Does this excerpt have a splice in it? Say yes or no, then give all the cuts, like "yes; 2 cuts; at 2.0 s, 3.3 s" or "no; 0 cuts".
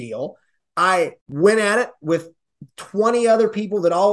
yes; 1 cut; at 1.2 s